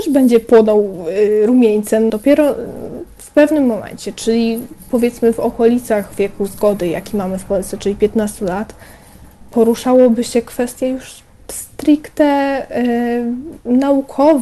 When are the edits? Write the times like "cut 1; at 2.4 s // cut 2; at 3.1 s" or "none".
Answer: cut 1; at 2.1 s